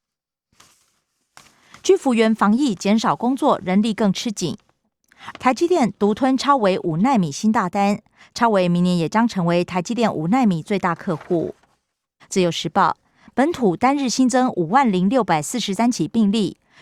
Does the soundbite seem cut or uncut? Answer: cut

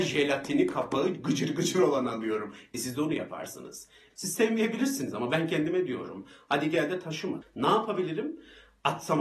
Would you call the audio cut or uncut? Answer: cut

